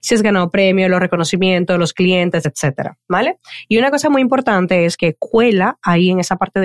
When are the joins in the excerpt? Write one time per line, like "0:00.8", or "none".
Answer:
none